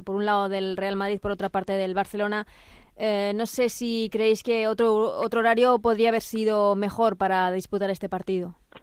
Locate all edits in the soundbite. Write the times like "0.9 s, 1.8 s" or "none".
none